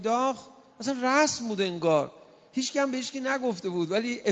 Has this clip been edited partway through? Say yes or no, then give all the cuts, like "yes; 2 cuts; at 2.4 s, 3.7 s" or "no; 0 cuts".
no; 0 cuts